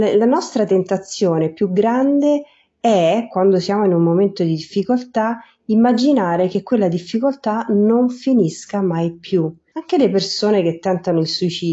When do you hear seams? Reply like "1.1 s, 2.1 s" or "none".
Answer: 9.7 s